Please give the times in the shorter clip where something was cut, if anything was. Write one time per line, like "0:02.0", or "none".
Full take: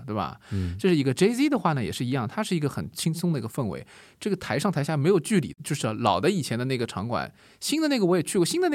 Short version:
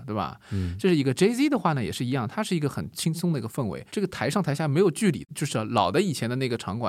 0:03.9